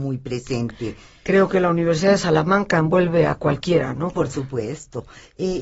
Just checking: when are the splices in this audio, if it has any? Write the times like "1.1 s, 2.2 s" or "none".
4.1 s